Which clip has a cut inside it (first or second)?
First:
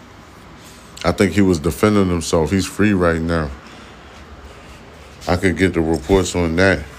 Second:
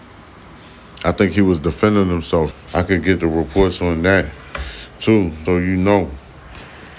second